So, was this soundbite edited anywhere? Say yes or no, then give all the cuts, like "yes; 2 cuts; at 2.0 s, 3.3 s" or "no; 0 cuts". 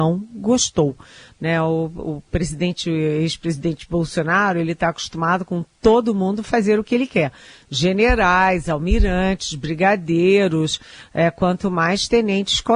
no; 0 cuts